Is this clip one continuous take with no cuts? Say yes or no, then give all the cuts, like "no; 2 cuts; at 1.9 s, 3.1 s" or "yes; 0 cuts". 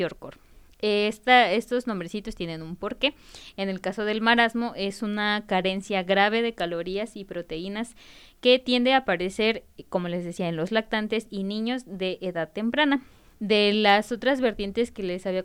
no; 1 cut; at 13.3 s